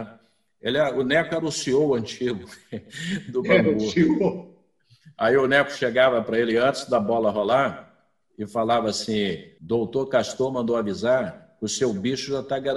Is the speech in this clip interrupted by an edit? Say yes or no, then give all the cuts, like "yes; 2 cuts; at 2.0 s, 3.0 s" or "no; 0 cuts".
yes; 1 cut; at 9.6 s